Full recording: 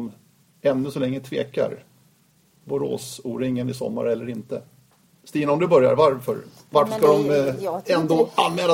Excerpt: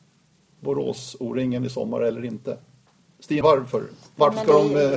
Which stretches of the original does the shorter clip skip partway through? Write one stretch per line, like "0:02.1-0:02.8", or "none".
0:05.5-0:06.0